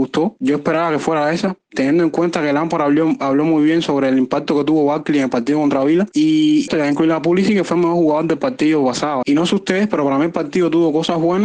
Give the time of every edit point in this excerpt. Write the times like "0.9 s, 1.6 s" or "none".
6.7 s, 9.2 s